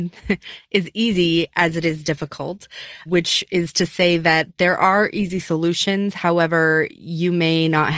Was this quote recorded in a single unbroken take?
no; 1 cut; at 3.1 s

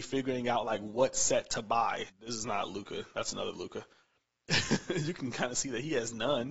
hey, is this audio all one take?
no; 1 cut; at 2.1 s

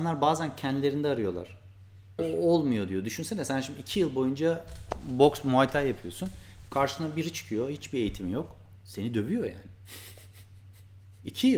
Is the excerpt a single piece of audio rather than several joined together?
no; 1 cut; at 2.2 s

